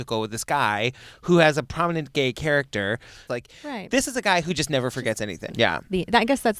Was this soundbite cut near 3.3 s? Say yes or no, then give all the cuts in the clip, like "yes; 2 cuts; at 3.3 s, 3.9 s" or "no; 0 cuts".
yes; 2 cuts; at 3.3 s, 5.5 s